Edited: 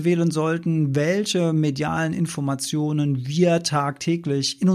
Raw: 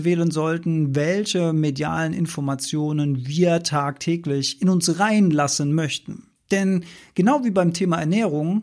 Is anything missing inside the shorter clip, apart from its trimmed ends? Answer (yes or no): no